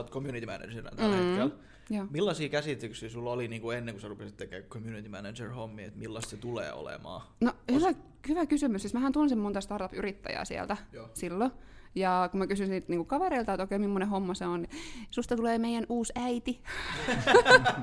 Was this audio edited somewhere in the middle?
yes; 1 cut; at 14.6 s

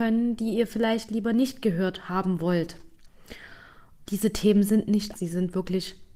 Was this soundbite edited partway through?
yes; 2 cuts; at 4.1 s, 5.1 s

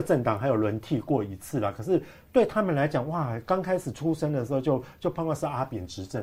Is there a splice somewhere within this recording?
no; 0 cuts

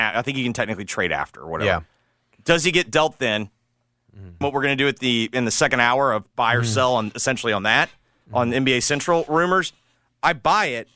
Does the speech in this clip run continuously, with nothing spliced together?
no; 1 cut; at 4.4 s

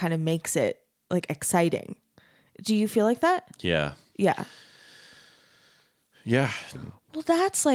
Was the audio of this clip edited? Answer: yes; 1 cut; at 6.7 s

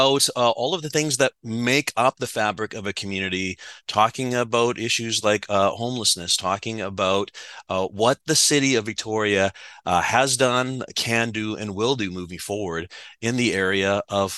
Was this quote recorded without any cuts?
yes; 0 cuts

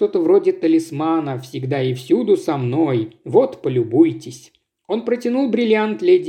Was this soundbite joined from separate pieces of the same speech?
no; 0 cuts

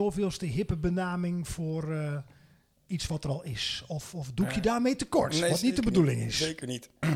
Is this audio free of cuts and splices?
yes; 0 cuts

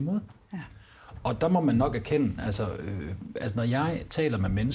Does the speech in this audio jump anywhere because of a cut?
no; 0 cuts

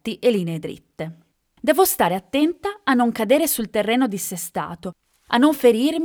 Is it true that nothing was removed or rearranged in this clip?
yes; 0 cuts

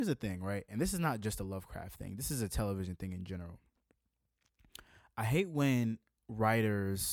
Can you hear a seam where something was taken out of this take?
no; 0 cuts

